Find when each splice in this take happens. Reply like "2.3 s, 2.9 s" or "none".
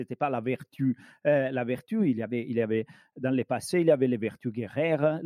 none